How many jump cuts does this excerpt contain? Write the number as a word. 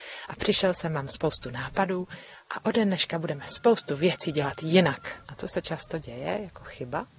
one